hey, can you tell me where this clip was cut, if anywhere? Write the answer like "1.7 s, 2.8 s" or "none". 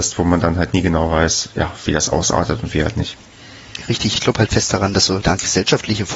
4.2 s, 5.2 s